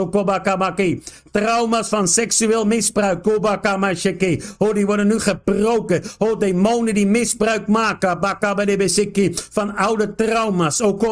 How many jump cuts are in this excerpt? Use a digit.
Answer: 0